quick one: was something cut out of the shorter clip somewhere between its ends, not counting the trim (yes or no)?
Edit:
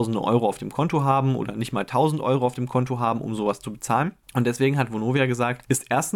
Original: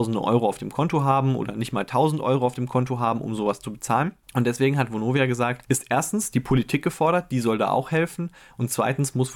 no